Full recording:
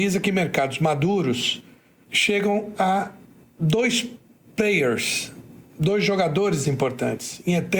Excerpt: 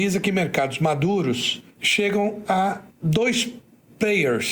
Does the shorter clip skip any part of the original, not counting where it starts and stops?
yes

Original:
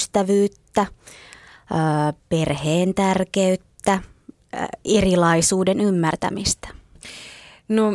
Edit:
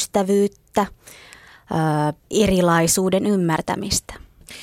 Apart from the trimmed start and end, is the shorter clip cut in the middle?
yes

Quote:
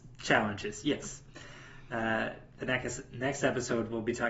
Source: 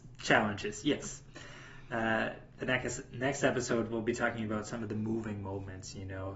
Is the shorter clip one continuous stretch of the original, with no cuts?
yes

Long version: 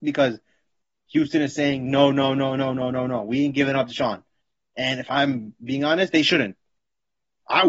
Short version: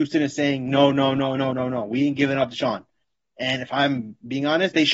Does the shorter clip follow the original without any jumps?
no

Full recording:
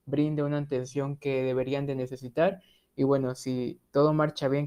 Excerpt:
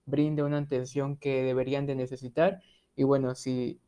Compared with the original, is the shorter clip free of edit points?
yes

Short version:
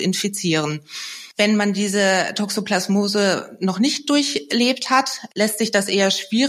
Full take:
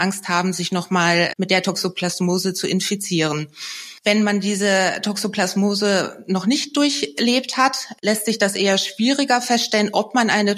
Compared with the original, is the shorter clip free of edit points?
yes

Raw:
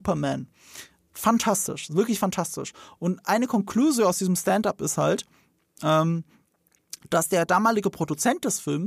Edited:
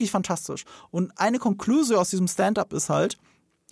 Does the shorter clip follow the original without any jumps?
yes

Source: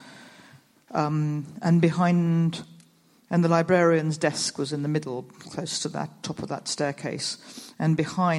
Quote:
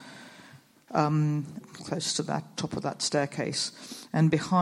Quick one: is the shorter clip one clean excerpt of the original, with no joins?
no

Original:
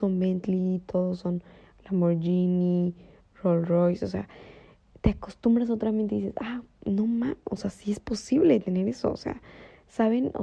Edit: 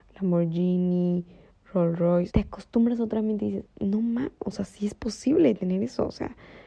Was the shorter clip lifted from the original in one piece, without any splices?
no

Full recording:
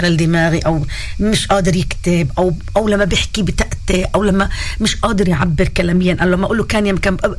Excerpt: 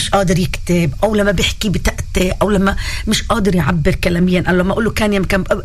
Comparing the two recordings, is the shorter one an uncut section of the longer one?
no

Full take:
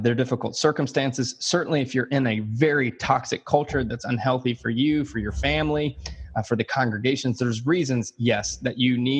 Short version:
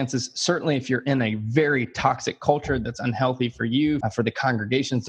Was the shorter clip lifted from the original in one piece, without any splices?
no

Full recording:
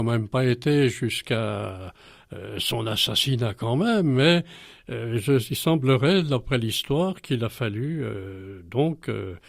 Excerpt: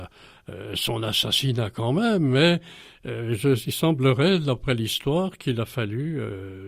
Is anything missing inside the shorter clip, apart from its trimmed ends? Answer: no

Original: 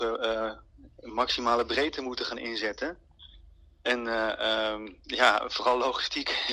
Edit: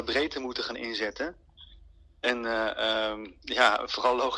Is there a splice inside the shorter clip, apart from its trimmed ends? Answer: no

